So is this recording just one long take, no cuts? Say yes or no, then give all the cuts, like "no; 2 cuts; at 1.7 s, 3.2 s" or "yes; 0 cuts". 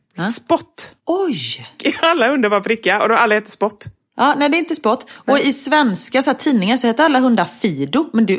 no; 1 cut; at 1.0 s